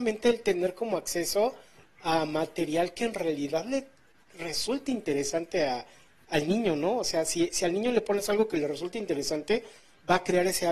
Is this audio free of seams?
yes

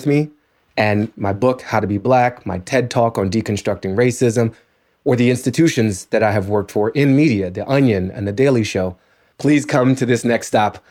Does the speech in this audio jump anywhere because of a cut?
yes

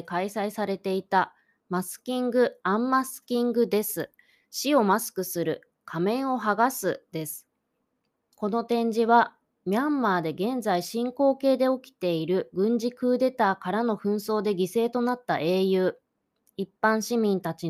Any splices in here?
no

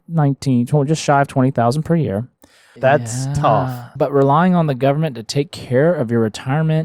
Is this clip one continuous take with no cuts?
no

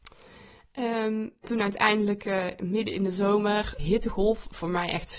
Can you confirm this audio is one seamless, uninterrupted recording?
no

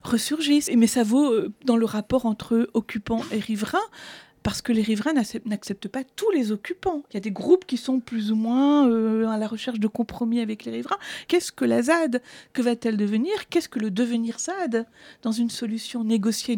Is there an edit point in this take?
yes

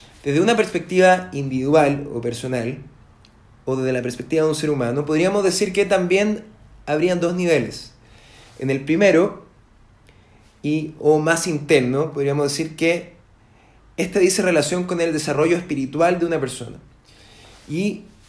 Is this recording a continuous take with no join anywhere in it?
yes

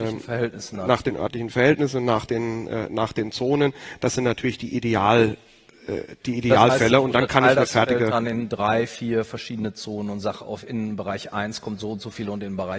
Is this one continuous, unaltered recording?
yes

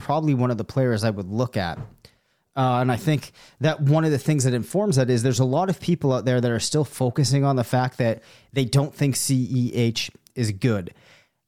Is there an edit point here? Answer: no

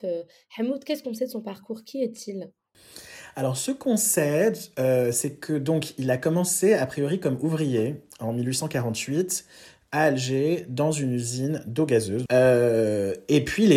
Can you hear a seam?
yes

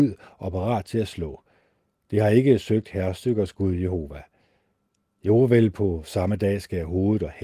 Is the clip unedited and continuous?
no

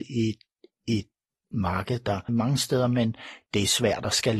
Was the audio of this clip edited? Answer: yes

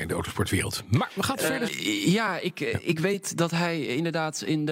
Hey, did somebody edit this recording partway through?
yes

